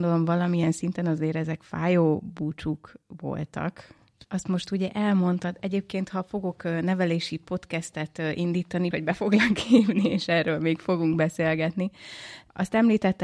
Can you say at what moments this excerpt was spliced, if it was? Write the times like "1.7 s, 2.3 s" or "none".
4.2 s, 8.9 s